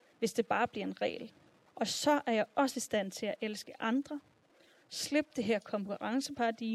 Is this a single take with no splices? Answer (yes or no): no